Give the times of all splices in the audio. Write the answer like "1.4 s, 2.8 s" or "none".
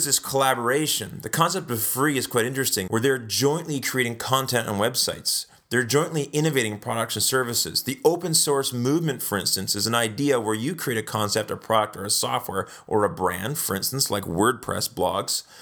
2.9 s

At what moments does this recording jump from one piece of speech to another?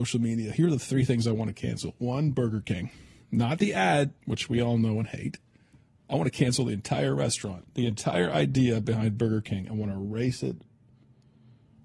4.2 s

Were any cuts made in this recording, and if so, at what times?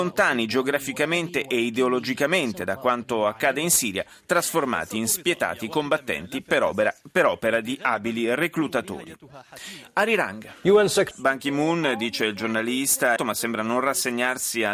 11.1 s, 13.2 s

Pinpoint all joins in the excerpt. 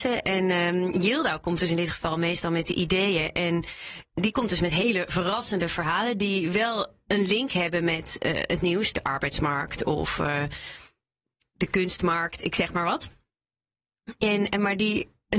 none

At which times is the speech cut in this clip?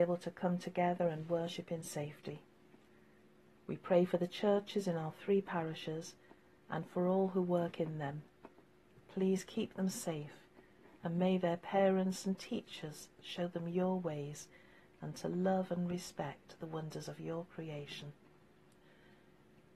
8.9 s, 14.9 s

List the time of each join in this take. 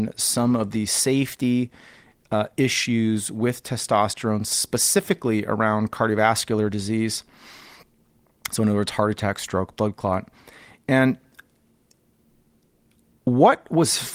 none

